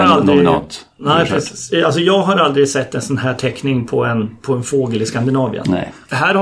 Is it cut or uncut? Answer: uncut